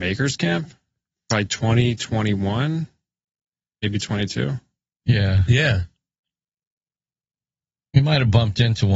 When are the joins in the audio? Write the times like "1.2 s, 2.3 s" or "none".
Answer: 5.0 s